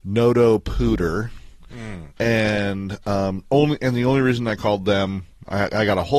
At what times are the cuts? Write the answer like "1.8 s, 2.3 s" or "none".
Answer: none